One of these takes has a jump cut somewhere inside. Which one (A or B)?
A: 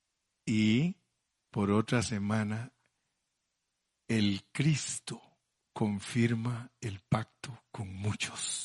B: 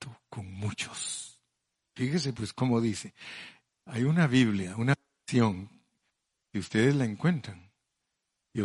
B